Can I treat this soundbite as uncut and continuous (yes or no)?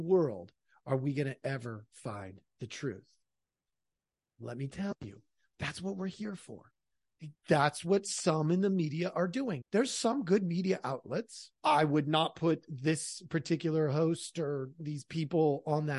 no